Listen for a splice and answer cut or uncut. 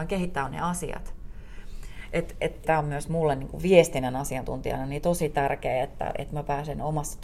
cut